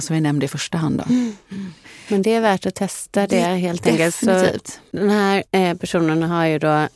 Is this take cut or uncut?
uncut